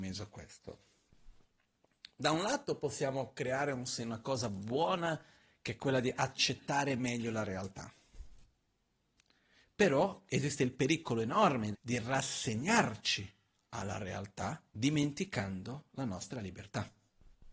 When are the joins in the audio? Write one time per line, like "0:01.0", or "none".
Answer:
0:11.7
0:14.7